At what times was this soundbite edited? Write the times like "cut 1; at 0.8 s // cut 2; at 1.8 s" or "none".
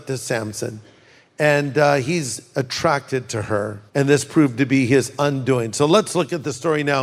cut 1; at 3.9 s